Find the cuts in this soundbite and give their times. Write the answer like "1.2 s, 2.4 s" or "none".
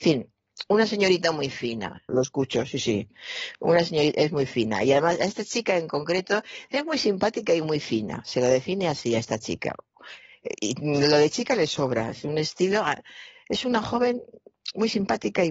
2.1 s

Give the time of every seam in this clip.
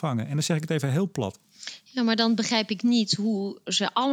none

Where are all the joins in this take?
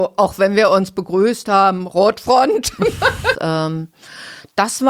3.3 s

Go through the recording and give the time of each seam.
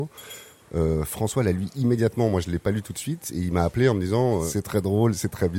none

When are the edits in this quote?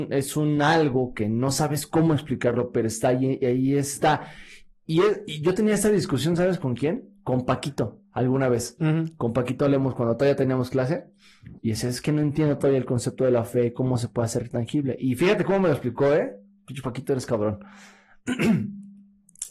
11.6 s

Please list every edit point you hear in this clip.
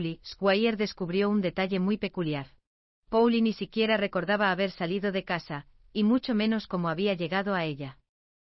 2.9 s

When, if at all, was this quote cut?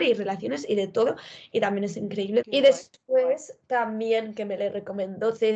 2.4 s

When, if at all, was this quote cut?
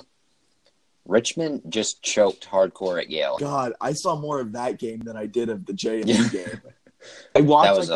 3.4 s

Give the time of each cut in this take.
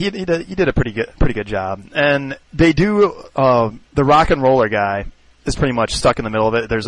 2.4 s, 3.9 s

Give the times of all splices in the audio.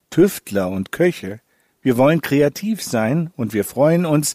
none

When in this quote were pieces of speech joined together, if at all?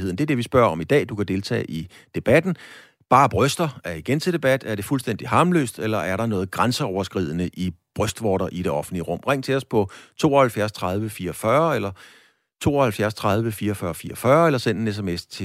none

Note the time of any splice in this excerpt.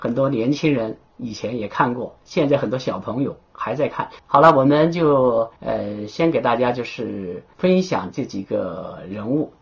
4.2 s, 5.6 s, 7.5 s

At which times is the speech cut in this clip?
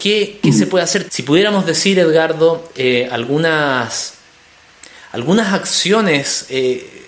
1.1 s

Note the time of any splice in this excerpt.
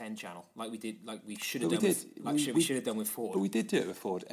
none

